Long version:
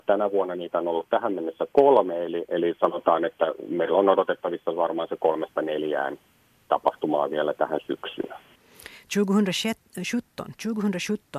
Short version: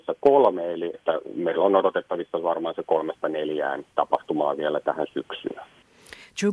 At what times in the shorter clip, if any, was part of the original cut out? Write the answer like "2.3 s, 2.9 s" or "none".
0.9 s, 3.9 s